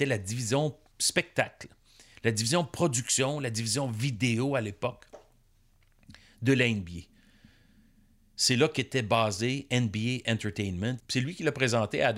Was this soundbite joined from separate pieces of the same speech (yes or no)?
yes